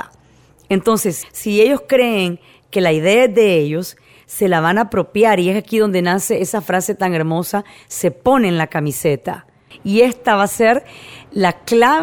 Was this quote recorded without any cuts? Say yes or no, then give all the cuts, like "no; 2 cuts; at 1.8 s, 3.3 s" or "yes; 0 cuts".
no; 2 cuts; at 1.2 s, 9.7 s